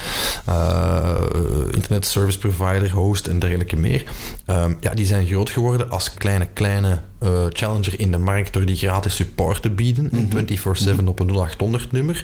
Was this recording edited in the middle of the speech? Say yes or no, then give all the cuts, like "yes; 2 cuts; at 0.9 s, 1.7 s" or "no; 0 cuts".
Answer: yes; 1 cut; at 6.1 s